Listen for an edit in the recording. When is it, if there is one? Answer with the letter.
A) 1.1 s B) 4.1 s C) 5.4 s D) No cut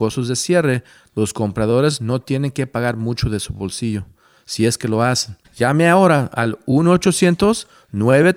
C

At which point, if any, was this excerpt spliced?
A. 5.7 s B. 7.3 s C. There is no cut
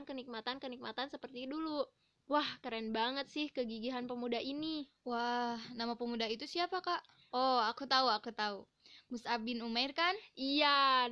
B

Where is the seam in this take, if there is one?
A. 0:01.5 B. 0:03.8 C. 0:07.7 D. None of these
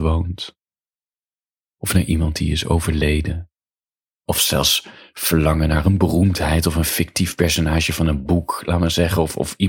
D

